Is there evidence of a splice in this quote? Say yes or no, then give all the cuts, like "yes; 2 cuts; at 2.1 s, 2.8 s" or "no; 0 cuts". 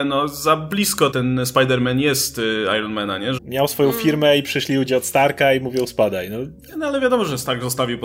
yes; 2 cuts; at 1.1 s, 3.4 s